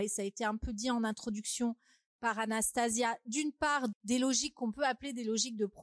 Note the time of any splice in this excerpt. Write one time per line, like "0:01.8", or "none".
0:03.9